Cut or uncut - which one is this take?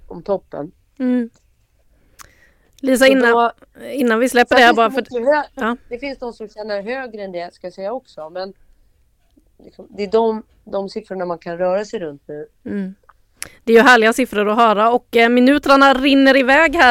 uncut